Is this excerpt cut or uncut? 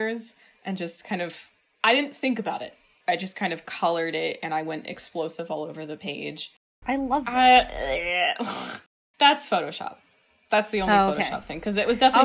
cut